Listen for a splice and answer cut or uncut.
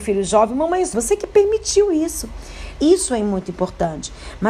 cut